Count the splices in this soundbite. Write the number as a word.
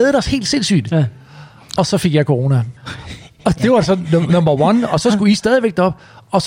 one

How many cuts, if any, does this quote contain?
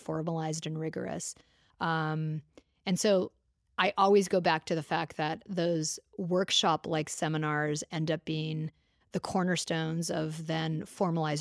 one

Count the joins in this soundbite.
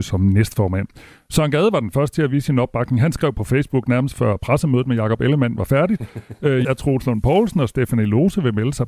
one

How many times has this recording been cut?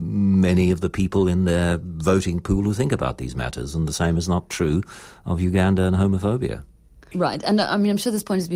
one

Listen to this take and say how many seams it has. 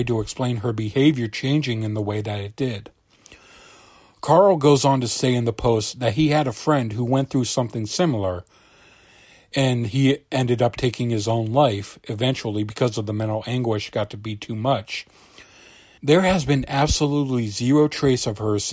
one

